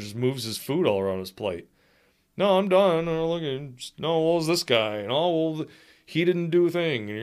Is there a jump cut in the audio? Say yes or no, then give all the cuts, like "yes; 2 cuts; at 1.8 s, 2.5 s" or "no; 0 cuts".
no; 0 cuts